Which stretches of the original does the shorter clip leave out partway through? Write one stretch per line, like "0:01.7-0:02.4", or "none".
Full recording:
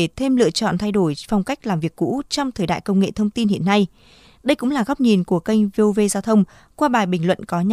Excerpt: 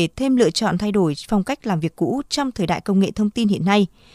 none